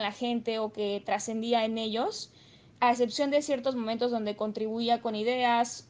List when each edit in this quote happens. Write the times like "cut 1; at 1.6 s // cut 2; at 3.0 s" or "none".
cut 1; at 2.7 s

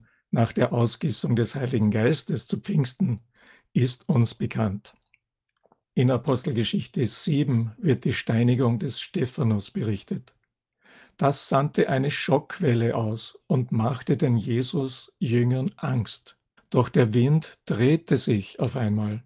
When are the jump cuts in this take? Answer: cut 1; at 5.8 s // cut 2; at 16.6 s

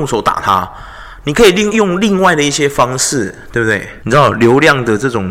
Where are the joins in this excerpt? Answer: cut 1; at 1.7 s // cut 2; at 4.0 s

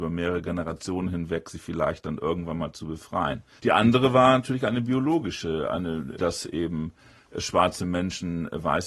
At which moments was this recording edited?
cut 1; at 3.6 s // cut 2; at 6.2 s

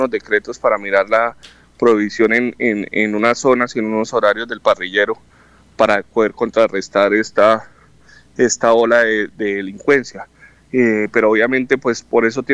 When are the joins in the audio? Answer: none

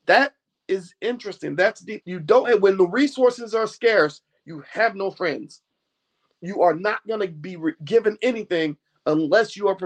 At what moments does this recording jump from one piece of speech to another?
cut 1; at 2.0 s

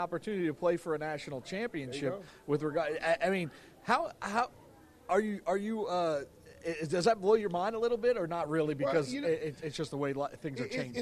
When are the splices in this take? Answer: none

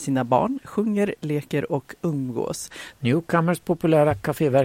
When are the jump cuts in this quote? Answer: cut 1; at 2.9 s

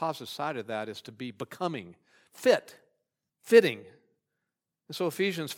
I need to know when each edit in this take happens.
cut 1; at 3.3 s

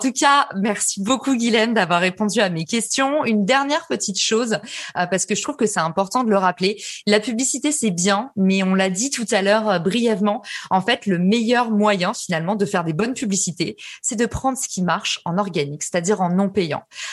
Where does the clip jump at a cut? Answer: none

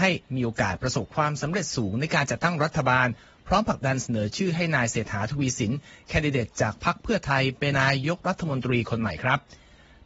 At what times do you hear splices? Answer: cut 1; at 7.7 s

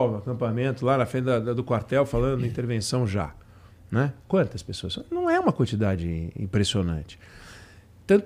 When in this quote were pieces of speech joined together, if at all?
none

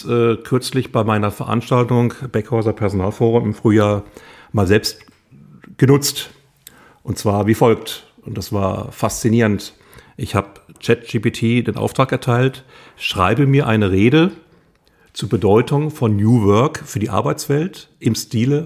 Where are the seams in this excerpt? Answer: none

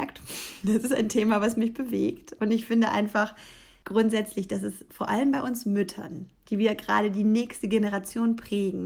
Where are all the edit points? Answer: none

